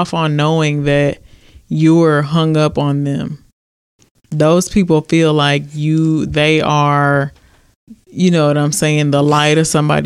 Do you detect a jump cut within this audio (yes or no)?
yes